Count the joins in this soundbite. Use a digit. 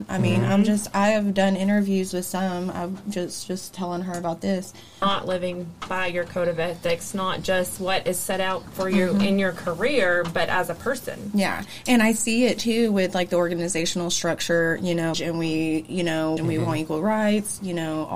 3